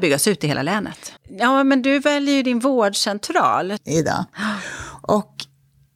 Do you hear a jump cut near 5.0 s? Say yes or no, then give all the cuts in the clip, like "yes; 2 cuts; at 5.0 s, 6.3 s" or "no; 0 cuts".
no; 2 cuts; at 1.2 s, 3.8 s